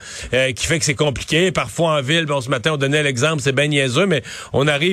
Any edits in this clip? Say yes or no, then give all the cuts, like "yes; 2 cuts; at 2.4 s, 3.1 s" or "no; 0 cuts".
no; 0 cuts